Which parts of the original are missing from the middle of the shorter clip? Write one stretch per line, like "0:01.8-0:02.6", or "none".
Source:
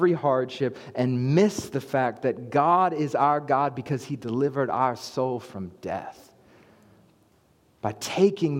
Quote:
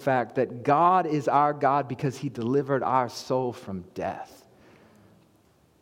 none